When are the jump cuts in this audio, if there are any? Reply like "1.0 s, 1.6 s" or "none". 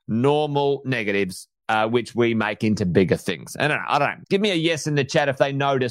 4.2 s